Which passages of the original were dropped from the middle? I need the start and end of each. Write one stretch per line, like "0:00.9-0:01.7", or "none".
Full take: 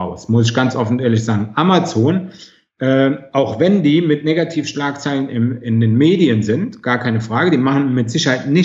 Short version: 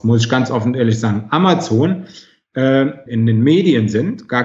0:03.3-0:05.6